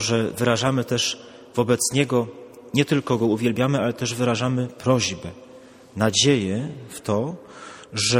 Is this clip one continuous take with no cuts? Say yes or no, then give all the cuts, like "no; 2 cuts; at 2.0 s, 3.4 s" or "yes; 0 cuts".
yes; 0 cuts